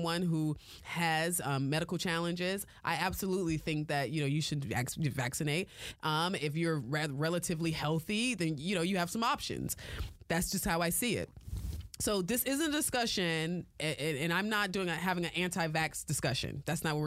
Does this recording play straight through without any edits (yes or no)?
yes